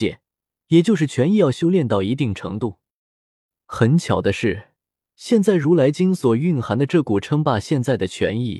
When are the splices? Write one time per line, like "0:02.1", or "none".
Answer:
none